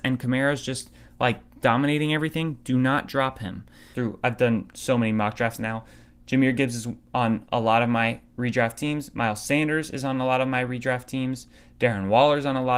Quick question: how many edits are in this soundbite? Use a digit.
2